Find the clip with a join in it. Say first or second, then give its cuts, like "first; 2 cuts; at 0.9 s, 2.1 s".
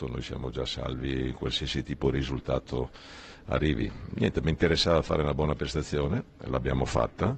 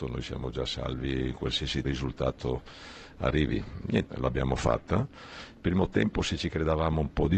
second; 2 cuts; at 1.8 s, 4.0 s